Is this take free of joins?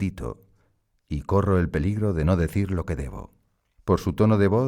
no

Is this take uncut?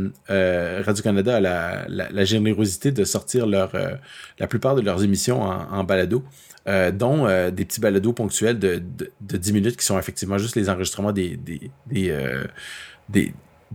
yes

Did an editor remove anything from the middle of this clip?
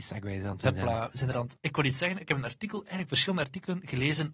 yes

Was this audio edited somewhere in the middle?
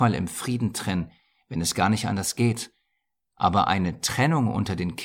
no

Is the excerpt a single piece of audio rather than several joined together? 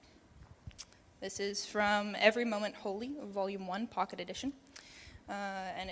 yes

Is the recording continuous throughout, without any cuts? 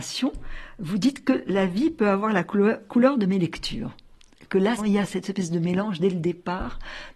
no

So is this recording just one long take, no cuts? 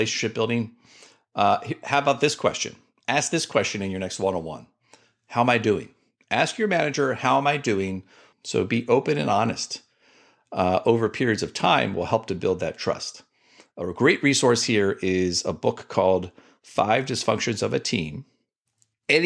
no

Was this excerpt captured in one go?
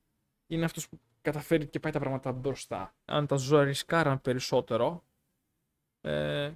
no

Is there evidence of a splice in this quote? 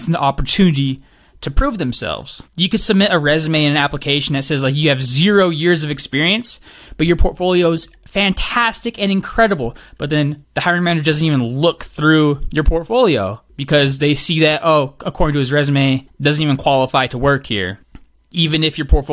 no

